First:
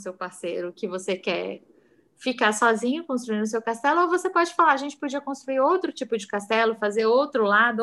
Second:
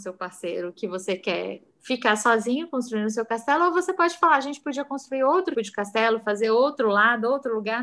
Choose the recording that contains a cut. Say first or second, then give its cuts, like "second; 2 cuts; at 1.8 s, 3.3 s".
second; 2 cuts; at 1.7 s, 5.5 s